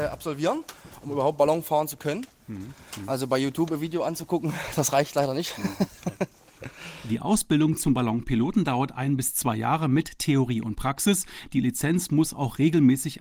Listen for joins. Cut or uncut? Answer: uncut